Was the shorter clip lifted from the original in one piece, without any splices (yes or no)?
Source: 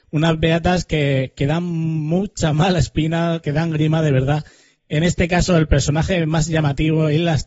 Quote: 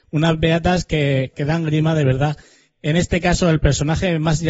no